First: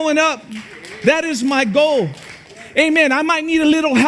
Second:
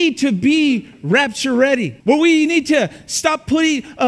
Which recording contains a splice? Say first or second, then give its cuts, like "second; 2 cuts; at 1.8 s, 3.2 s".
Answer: second; 1 cut; at 2.0 s